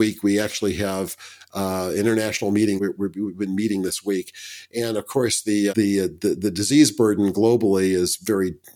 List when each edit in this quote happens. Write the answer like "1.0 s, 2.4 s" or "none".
2.8 s, 5.7 s